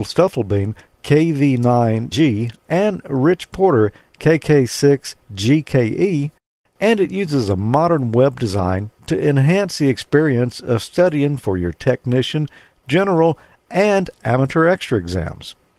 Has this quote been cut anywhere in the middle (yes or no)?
no